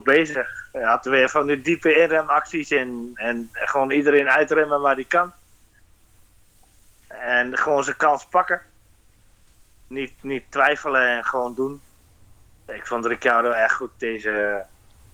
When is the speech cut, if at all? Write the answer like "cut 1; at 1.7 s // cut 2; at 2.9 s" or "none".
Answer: none